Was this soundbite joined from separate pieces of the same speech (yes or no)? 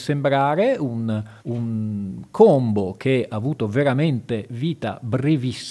yes